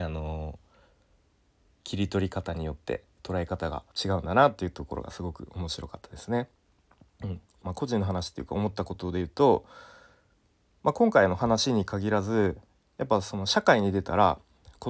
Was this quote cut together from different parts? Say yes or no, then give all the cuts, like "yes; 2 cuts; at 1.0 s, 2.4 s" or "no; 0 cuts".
yes; 2 cuts; at 3.9 s, 7.6 s